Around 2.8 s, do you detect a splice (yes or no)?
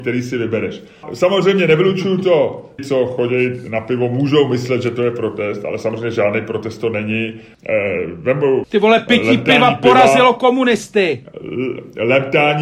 yes